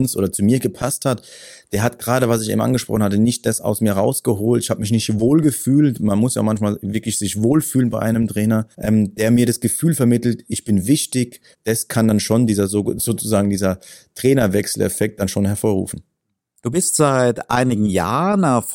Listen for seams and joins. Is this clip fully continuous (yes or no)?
no